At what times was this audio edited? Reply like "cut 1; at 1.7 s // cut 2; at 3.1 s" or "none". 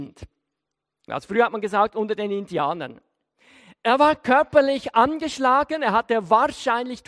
cut 1; at 1.1 s